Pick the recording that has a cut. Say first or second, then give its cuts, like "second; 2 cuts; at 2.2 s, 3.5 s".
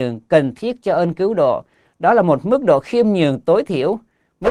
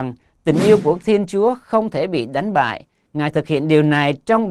second; 1 cut; at 3.1 s